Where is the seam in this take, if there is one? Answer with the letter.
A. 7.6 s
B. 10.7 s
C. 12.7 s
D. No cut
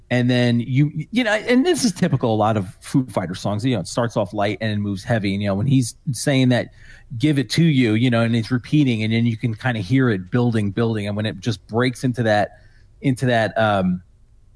B